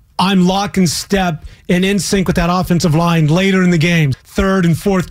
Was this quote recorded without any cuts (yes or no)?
no